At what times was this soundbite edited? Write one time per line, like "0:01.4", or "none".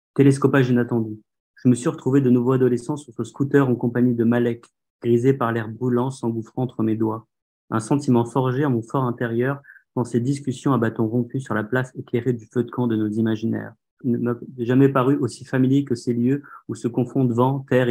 0:07.6
0:14.0